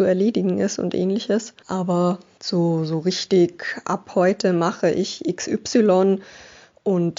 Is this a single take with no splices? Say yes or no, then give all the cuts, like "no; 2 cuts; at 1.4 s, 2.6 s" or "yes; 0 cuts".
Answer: no; 1 cut; at 1.6 s